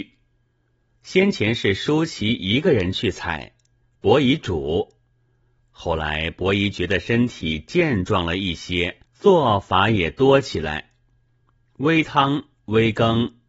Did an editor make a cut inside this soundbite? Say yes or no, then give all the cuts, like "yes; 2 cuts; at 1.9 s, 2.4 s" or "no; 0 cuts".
yes; 2 cuts; at 1.0 s, 9.1 s